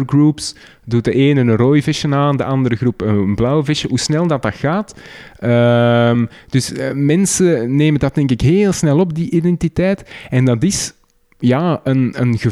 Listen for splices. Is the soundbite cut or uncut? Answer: uncut